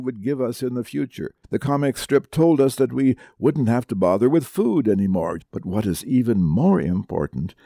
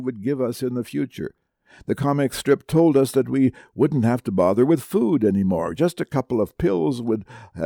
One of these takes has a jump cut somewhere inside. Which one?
first; 2 cuts; at 1.4 s, 5.4 s

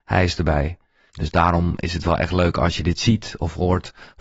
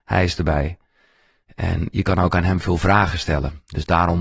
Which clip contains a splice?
first; 1 cut; at 1.1 s

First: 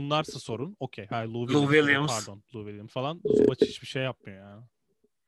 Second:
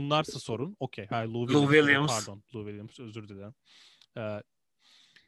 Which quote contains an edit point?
first; 1 cut; at 2.9 s

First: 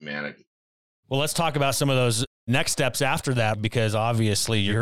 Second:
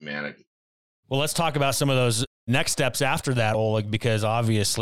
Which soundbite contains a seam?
first; 1 cut; at 3.5 s

